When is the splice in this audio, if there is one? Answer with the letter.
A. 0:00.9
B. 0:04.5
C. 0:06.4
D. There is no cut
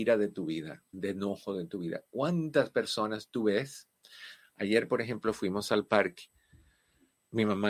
A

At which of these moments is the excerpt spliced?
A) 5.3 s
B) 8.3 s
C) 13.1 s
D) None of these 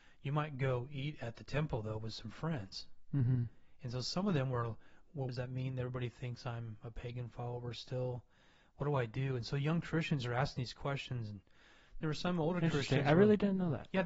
A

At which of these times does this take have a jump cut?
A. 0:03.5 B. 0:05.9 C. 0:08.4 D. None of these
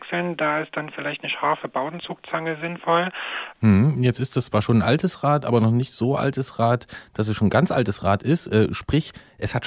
A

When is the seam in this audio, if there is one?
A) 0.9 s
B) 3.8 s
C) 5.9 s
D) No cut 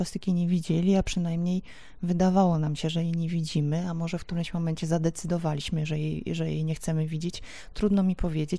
D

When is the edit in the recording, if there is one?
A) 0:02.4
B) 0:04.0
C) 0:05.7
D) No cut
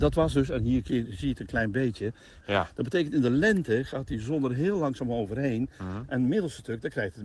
A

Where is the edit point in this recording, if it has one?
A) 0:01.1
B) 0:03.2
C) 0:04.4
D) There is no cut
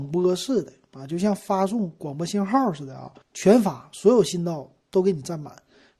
B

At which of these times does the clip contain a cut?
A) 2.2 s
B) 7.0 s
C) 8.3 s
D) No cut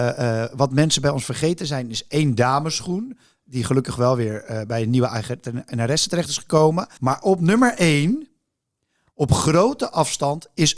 B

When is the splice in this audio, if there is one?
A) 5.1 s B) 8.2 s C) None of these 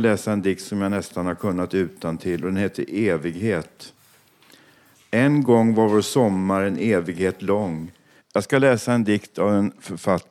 B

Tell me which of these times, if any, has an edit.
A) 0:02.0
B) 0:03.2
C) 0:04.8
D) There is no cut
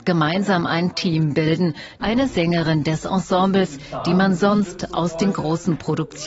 A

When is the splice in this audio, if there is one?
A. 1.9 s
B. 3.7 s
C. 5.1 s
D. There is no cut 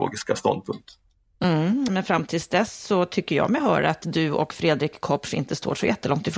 A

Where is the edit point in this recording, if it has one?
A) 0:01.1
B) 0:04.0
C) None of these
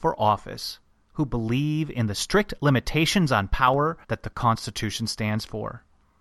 B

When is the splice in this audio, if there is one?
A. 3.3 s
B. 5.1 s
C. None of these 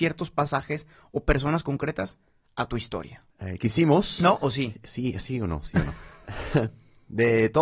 A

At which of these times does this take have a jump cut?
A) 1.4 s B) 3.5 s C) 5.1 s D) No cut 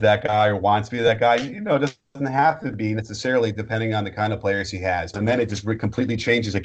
C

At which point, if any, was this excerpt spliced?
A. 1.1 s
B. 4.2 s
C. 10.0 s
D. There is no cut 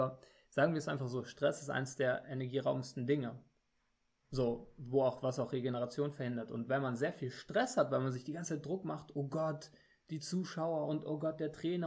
D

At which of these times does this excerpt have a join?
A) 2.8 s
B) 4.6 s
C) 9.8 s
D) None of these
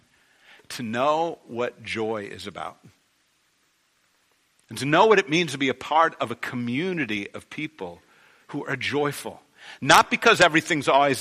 D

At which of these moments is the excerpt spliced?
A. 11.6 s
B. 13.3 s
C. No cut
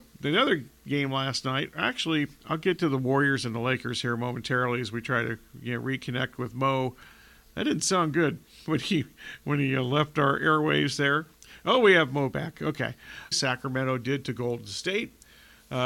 B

